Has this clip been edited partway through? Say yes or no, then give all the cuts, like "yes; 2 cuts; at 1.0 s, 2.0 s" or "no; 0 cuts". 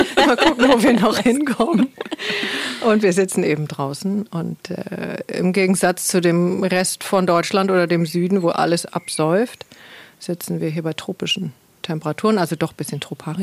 no; 0 cuts